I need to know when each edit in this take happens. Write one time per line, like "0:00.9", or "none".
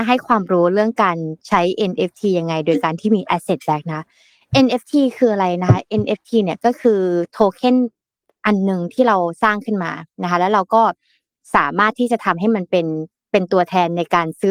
none